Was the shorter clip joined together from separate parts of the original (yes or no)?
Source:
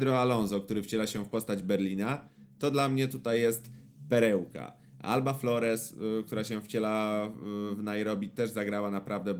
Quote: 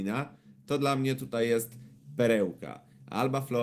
no